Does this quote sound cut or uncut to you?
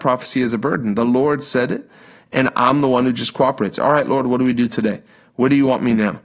uncut